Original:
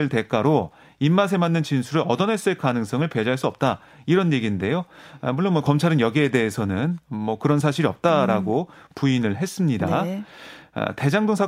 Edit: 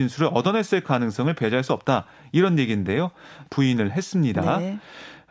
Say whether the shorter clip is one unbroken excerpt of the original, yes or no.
no